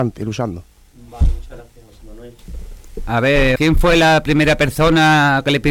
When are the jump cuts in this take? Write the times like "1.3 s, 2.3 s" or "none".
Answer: 3.6 s